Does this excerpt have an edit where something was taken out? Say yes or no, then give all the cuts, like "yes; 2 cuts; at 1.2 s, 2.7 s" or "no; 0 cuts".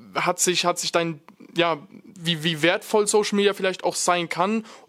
yes; 1 cut; at 2.2 s